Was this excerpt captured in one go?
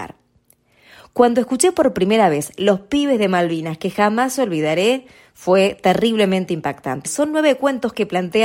no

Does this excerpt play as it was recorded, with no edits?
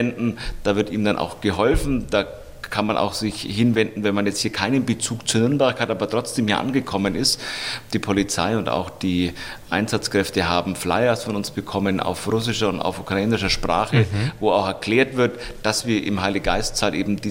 yes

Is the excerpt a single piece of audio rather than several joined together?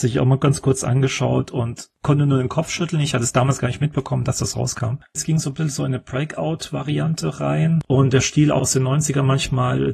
no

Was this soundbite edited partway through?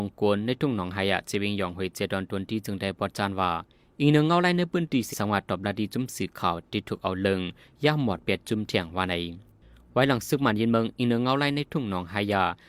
yes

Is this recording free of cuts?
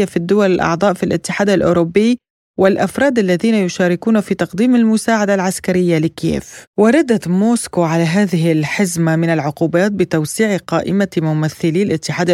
no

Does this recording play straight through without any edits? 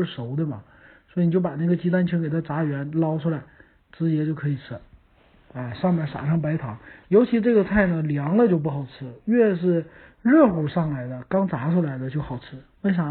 yes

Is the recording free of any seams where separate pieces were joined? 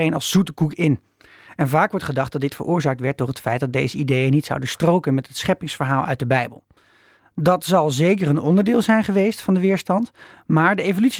yes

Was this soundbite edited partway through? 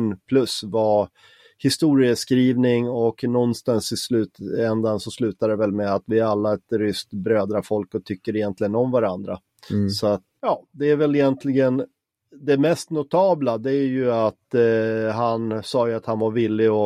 yes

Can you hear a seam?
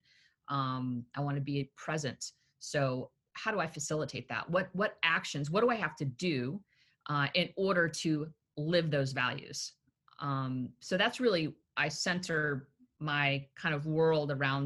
no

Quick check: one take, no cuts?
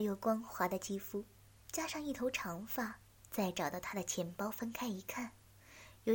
no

